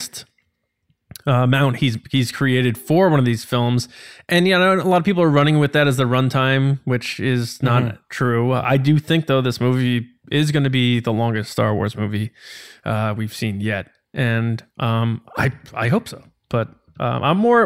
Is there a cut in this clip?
no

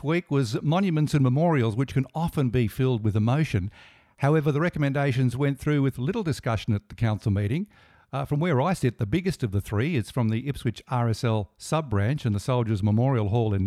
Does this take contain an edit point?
no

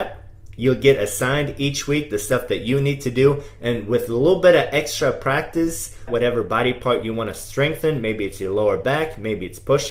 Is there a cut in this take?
yes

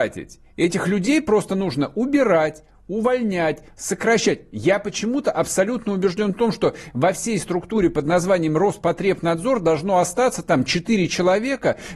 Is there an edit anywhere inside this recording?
no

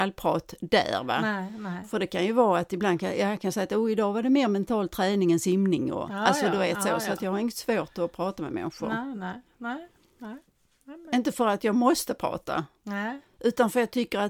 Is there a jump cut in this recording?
no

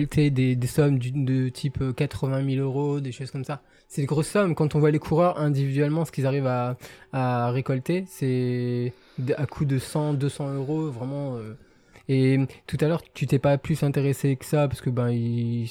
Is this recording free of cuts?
no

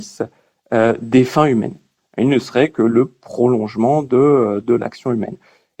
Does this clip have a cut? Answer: no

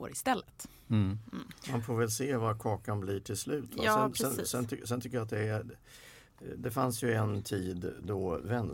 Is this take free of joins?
yes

